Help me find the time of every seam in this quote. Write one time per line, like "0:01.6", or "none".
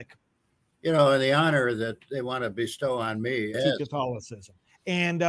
0:03.5